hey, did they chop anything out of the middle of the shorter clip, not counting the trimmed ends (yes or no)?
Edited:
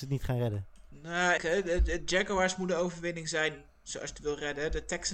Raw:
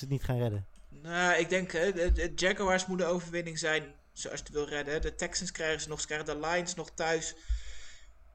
yes